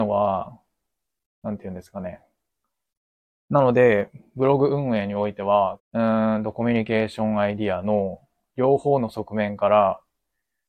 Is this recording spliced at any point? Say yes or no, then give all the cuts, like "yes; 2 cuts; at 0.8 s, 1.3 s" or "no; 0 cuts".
yes; 2 cuts; at 3.3 s, 5.8 s